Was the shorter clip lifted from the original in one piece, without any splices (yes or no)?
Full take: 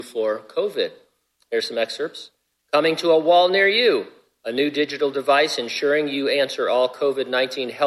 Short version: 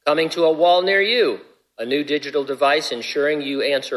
yes